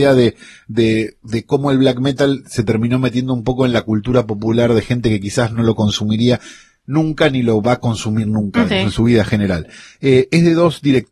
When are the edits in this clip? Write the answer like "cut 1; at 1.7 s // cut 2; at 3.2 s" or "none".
cut 1; at 8.7 s // cut 2; at 9.9 s